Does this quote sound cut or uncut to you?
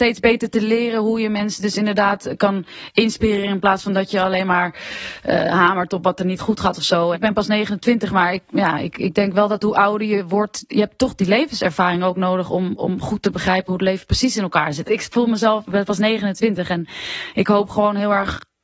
cut